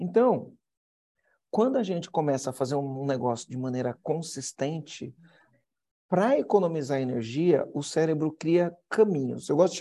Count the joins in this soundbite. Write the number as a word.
zero